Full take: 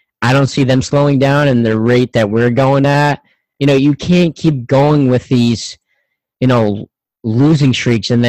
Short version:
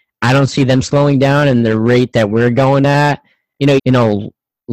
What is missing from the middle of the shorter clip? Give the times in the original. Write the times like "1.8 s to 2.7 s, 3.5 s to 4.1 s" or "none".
3.8 s to 6.3 s